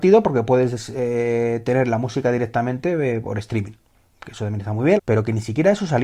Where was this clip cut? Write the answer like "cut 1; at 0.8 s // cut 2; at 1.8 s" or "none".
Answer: cut 1; at 5.0 s